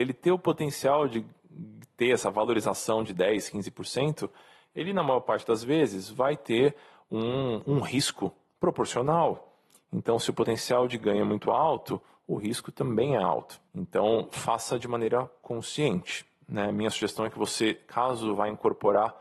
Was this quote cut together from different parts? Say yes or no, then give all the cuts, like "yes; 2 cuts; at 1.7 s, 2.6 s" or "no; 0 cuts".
yes; 1 cut; at 13.7 s